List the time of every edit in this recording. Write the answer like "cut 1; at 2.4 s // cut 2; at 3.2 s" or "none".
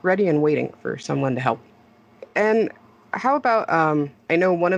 none